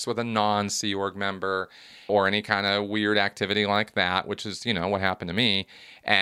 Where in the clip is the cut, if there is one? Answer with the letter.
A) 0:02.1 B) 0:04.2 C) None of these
A